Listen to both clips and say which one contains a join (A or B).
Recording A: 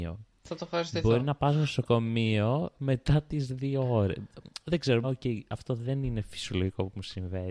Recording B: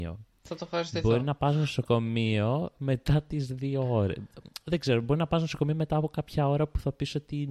A